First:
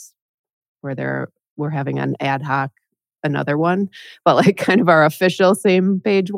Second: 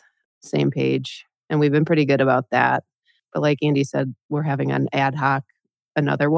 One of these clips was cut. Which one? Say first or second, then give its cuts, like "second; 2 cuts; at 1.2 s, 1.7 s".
second; 1 cut; at 4.2 s